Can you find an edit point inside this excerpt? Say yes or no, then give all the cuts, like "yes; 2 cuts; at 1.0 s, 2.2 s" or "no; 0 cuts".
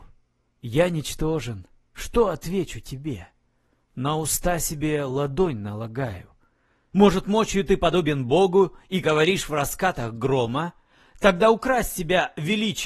yes; 2 cuts; at 6.9 s, 9.0 s